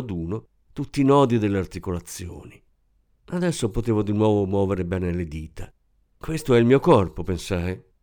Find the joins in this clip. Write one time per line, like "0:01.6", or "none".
none